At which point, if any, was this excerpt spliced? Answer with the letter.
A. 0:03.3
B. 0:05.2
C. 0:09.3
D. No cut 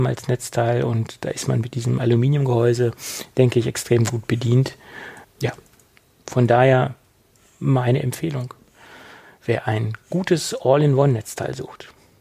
B